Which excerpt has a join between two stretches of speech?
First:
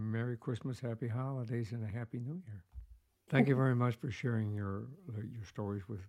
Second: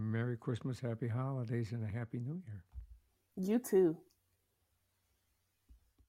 first; 1 cut; at 3.3 s

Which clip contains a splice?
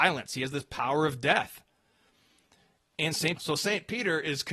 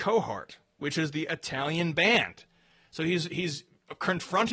first; 1 cut; at 3.4 s

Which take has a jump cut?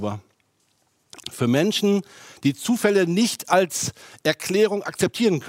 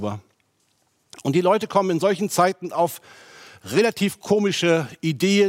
first; 1 cut; at 1.2 s

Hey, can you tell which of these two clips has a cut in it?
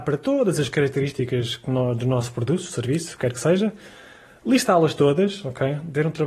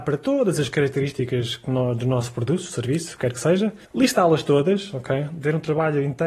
second; 1 cut; at 3.8 s

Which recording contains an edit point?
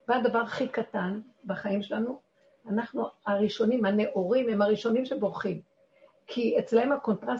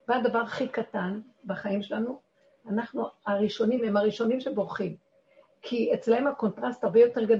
second; 1 cut; at 3.8 s

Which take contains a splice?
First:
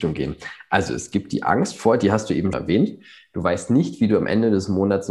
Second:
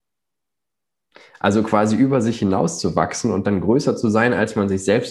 first; 1 cut; at 2.5 s

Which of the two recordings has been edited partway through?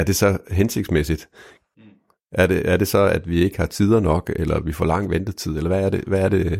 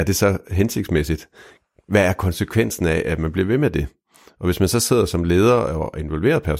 first; 1 cut; at 1.7 s

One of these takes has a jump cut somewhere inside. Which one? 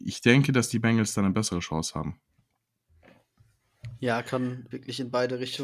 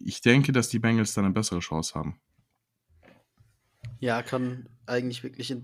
first; 1 cut; at 4.7 s

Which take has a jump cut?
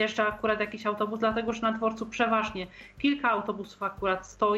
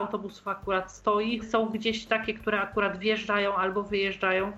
second; 1 cut; at 1.4 s

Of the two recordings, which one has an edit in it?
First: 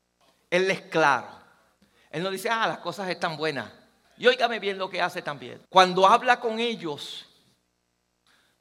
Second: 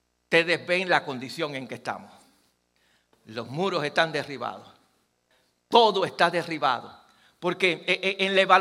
first; 2 cuts; at 4.0 s, 5.6 s

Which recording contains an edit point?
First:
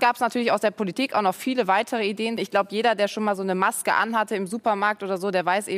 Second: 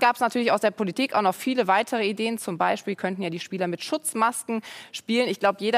first; 1 cut; at 2.4 s

